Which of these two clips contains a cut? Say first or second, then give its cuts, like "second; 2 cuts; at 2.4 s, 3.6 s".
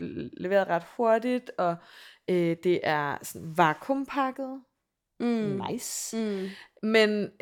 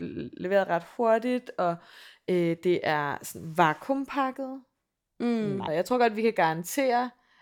second; 1 cut; at 5.7 s